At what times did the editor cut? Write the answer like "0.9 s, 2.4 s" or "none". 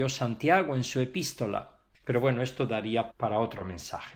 1.9 s, 3.1 s